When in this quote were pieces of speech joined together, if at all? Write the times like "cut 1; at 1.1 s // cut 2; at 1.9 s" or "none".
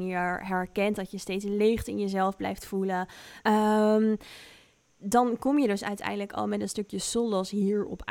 cut 1; at 3.4 s // cut 2; at 5.0 s